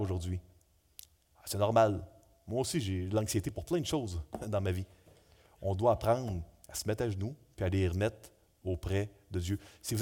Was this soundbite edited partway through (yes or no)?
no